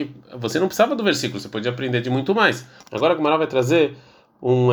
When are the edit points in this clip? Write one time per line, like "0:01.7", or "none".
0:02.8